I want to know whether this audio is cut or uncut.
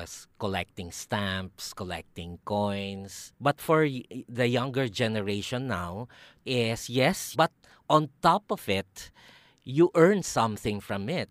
cut